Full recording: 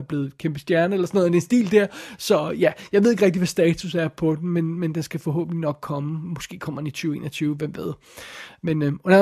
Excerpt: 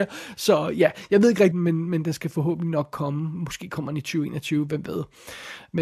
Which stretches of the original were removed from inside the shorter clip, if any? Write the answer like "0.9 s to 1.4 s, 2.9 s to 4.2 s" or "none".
3.3 s to 4.4 s